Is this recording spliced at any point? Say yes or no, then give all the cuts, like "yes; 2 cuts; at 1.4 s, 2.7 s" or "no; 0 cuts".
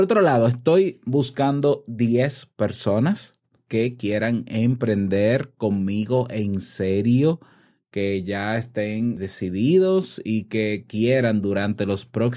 yes; 1 cut; at 9.2 s